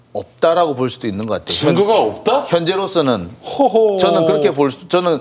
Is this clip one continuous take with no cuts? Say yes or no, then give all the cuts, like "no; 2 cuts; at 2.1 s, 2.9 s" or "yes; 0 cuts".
yes; 0 cuts